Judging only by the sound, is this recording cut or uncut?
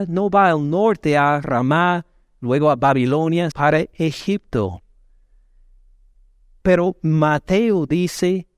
cut